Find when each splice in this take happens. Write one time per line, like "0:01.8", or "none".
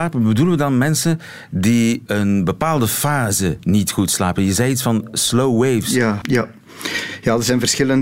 0:02.1
0:06.2